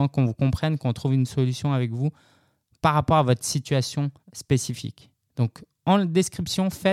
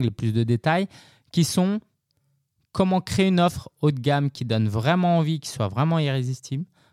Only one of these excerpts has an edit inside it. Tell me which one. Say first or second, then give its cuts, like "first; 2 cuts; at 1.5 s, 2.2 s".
first; 1 cut; at 4.2 s